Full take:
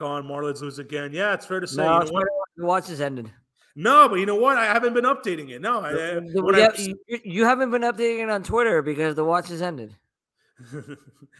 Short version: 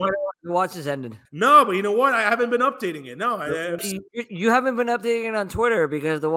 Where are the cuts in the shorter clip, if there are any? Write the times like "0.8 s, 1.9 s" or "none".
1.3 s, 3.8 s